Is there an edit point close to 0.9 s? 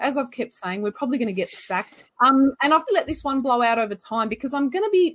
no; 1 cut; at 2.9 s

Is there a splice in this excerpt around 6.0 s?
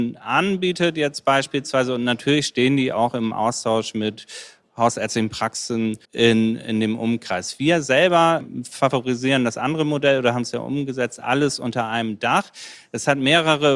yes; 1 cut; at 6.0 s

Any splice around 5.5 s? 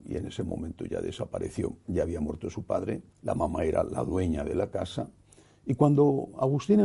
no; 2 cuts; at 1.9 s, 3.1 s

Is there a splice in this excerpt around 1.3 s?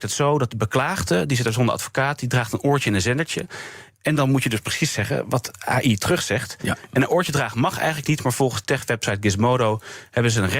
no; 1 cut; at 3.9 s

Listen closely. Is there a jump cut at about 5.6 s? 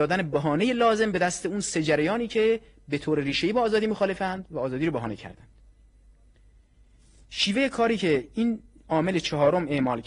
no; 0 cuts

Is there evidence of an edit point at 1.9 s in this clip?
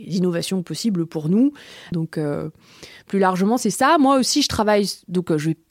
yes; 1 cut; at 1.9 s

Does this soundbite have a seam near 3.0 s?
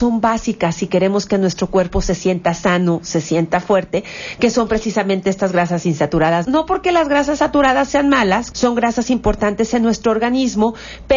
no; 2 cuts; at 6.4 s, 8.5 s

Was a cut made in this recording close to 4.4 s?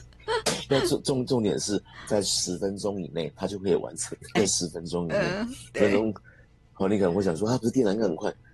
yes; 1 cut; at 4.4 s

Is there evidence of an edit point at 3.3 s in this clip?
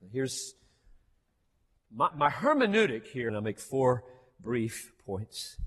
yes; 2 cuts; at 2.1 s, 3.3 s

